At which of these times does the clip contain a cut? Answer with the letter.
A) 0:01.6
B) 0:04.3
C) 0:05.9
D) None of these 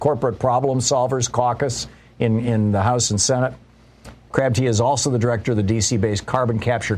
B